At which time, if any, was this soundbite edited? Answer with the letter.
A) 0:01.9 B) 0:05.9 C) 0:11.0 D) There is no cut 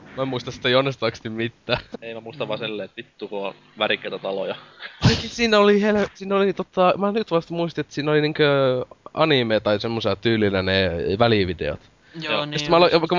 A